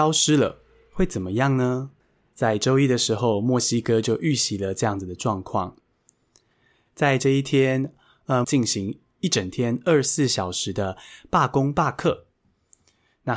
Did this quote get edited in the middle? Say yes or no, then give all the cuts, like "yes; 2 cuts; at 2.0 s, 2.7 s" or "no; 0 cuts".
yes; 1 cut; at 8.4 s